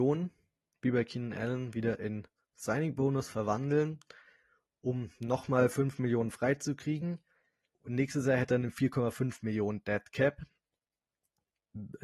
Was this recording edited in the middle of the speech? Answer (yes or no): yes